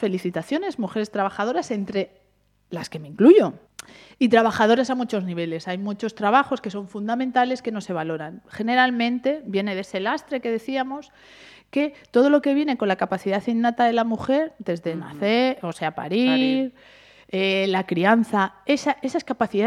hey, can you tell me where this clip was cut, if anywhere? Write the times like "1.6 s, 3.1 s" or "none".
none